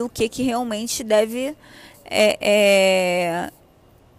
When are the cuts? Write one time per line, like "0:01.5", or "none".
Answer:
none